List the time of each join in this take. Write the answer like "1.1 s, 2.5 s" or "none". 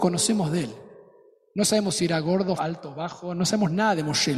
2.6 s